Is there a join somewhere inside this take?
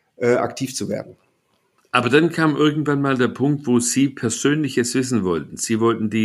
no; 0 cuts

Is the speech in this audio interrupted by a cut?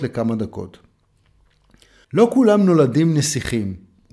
no; 0 cuts

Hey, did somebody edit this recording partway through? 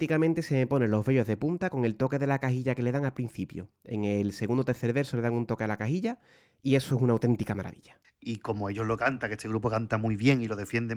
yes; 1 cut; at 8.0 s

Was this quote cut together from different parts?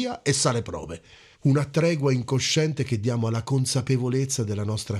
yes; 1 cut; at 1.3 s

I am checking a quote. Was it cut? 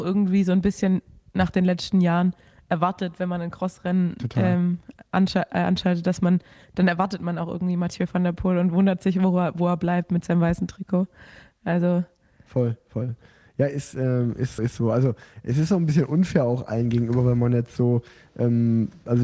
yes; 1 cut; at 14.6 s

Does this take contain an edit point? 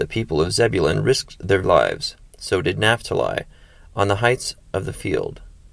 yes; 1 cut; at 1.6 s

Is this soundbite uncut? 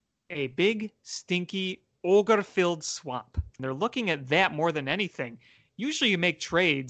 no; 1 cut; at 3.6 s

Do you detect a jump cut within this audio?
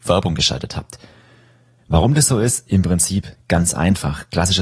yes; 1 cut; at 1.8 s

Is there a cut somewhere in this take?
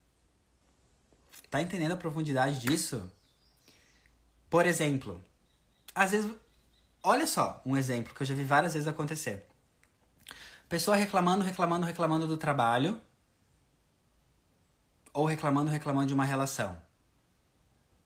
no; 0 cuts

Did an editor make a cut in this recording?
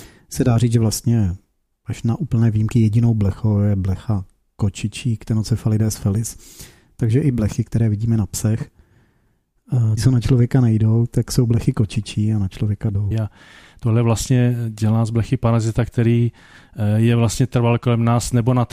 yes; 2 cuts; at 10.0 s, 13.1 s

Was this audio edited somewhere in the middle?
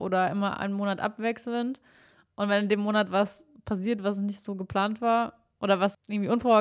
no; 0 cuts

